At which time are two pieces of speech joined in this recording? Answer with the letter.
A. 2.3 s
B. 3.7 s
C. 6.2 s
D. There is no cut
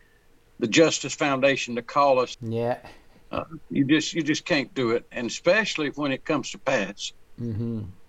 A